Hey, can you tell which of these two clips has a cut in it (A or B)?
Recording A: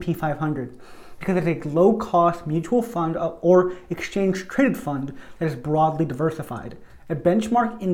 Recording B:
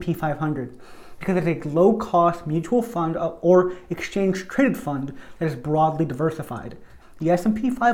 B